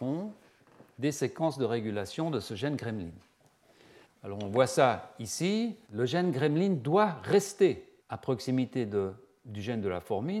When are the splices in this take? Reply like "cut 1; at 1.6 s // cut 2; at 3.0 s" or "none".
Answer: cut 1; at 4.1 s // cut 2; at 5.9 s // cut 3; at 8.0 s